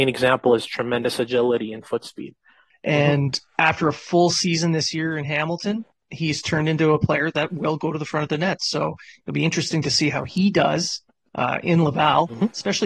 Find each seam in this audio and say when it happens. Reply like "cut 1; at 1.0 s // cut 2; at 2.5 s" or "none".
cut 1; at 2.7 s